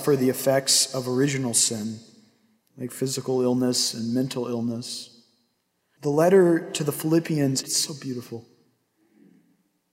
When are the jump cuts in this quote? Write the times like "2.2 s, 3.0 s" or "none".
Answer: 6.0 s, 7.6 s